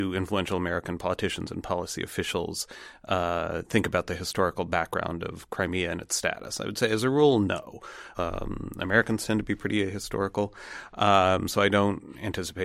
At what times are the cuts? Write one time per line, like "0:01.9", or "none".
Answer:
0:08.1